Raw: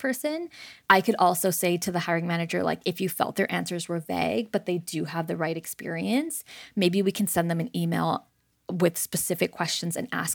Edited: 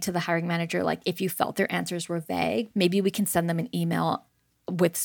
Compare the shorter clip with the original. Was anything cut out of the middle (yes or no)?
yes